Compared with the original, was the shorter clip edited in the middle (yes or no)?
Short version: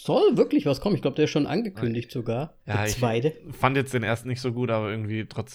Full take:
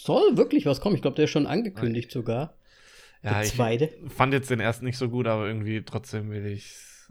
yes